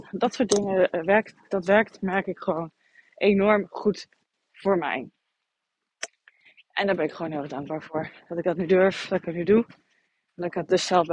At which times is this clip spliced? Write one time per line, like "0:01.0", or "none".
none